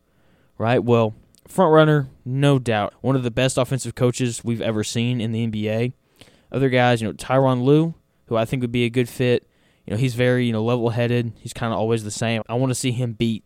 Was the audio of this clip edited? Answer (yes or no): yes